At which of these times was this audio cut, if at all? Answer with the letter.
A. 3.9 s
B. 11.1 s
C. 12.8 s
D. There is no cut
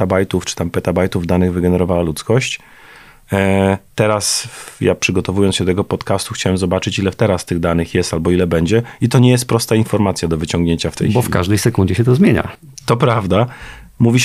D